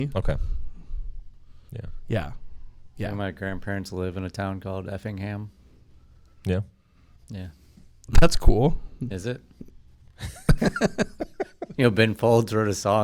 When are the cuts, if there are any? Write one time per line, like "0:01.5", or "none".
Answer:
none

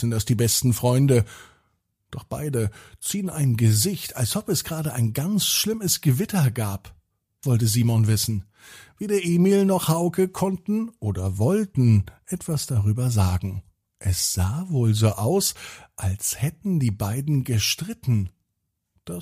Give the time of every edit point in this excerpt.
0:07.4

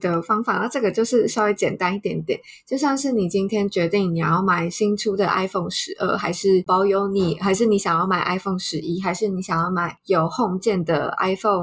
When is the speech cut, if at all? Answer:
0:06.7

